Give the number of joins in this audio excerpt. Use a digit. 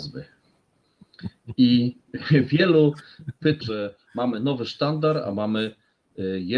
1